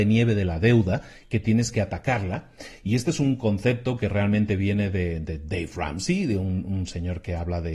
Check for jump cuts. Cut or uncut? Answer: uncut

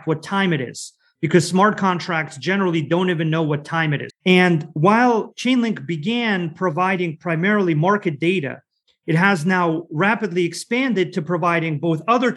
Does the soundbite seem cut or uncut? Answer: cut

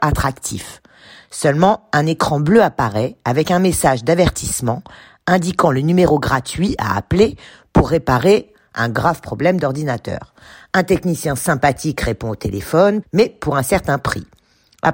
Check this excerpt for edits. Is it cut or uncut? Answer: cut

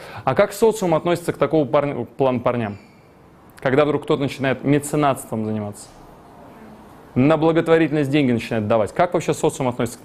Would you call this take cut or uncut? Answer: uncut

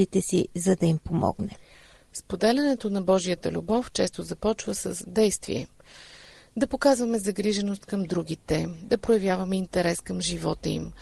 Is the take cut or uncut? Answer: uncut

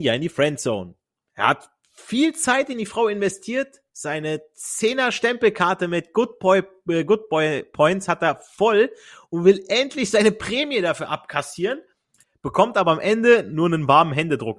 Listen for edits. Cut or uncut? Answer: uncut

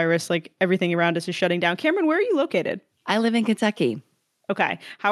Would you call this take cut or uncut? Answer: uncut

